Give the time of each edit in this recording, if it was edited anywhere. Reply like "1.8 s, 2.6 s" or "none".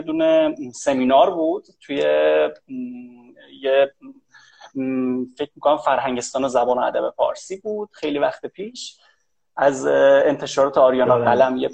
none